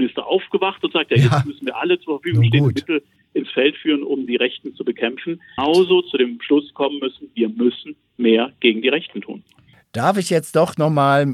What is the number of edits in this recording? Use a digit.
1